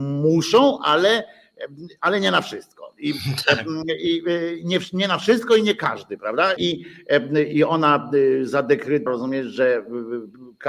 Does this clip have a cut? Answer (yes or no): yes